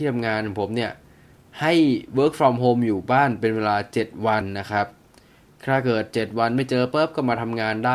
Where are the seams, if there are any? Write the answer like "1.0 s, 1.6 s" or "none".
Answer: none